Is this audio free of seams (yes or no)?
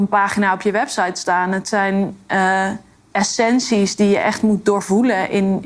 yes